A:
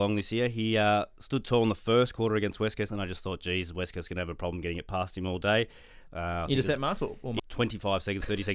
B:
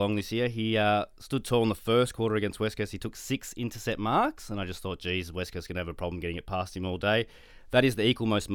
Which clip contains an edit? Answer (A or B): A